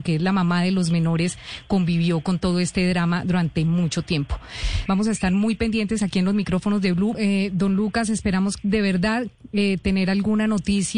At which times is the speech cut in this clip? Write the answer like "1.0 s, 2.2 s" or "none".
4.9 s, 7.1 s